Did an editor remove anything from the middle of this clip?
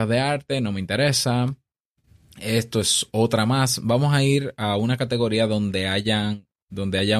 no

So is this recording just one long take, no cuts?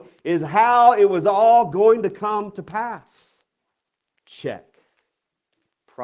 no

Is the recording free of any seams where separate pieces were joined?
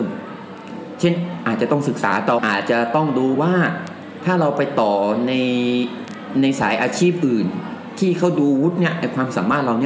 no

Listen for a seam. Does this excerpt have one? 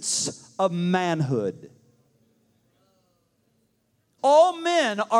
yes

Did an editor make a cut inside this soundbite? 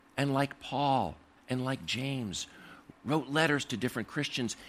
yes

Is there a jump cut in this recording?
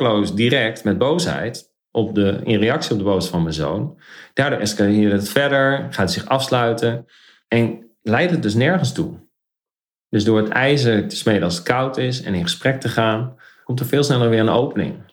no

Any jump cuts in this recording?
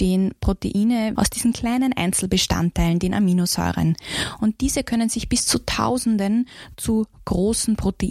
yes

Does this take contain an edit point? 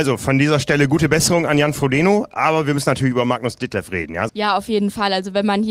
yes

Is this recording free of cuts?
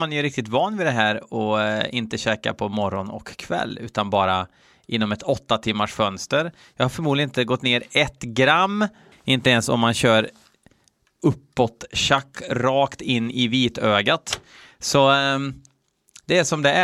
no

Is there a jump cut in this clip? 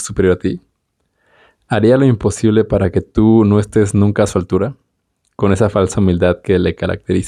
no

